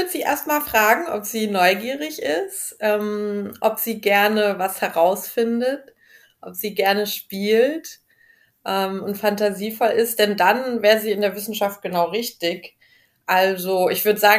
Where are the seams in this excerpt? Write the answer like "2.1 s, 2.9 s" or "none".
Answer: none